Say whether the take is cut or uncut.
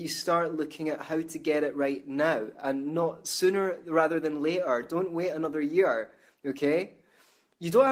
uncut